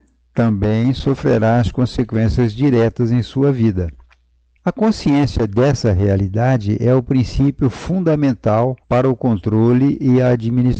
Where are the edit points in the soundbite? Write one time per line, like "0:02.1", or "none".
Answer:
0:04.6
0:08.8